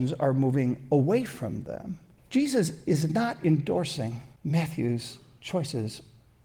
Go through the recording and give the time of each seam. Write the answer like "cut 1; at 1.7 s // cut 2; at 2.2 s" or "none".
cut 1; at 2.2 s // cut 2; at 4.4 s

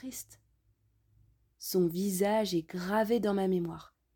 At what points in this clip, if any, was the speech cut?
cut 1; at 1.5 s

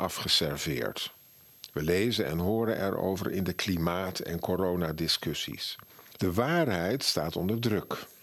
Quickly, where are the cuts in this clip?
cut 1; at 6.2 s

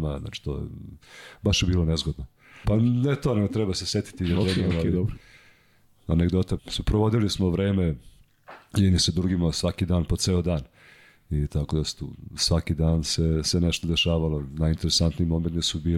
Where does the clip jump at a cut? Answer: cut 1; at 2.6 s // cut 2; at 6.6 s

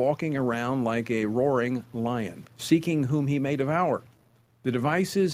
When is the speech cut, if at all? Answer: cut 1; at 2.5 s

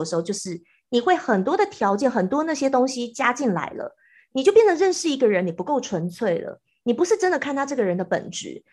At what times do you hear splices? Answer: none

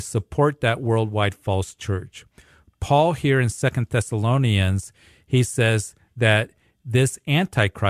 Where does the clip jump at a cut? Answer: none

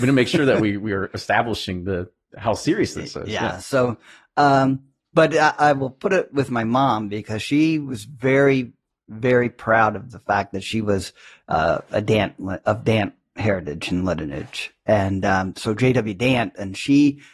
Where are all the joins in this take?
none

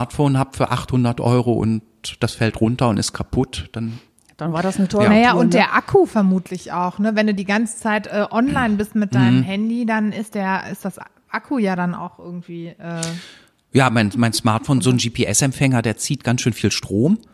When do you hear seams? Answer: none

